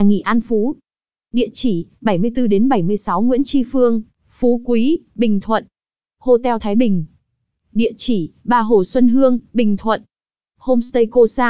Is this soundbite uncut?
no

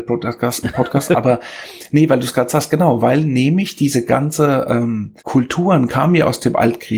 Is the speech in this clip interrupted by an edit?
yes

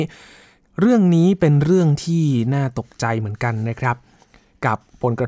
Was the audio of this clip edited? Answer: no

